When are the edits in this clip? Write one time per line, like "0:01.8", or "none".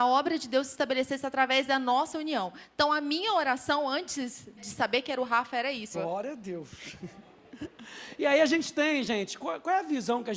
0:04.6
0:05.9